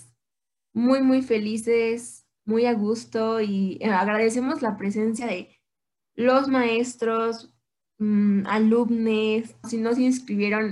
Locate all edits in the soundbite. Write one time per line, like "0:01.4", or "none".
0:09.6